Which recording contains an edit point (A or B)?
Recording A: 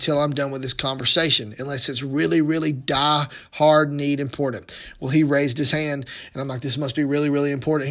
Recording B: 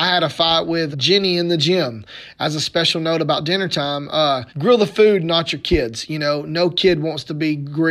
B